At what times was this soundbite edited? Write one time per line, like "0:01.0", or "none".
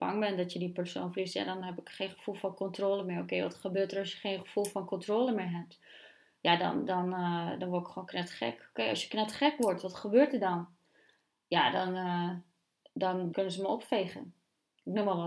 0:13.3